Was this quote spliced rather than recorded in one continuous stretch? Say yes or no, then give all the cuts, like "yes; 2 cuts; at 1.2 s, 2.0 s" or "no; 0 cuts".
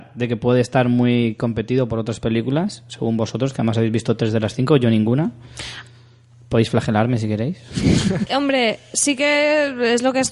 yes; 1 cut; at 8.3 s